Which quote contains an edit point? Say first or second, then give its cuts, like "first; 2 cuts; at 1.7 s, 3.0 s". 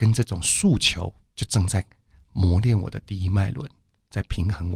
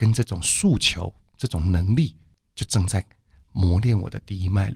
first; 1 cut; at 1.2 s